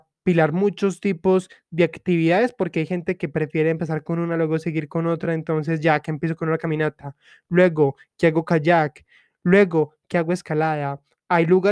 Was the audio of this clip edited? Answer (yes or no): no